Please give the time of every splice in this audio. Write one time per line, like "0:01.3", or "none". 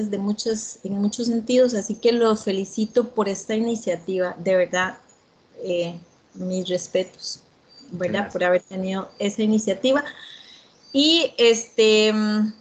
none